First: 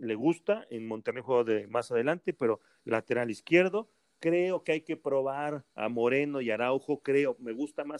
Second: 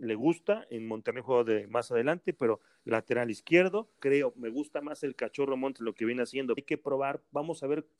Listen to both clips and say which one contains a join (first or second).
second